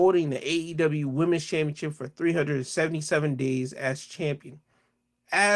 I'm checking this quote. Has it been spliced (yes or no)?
no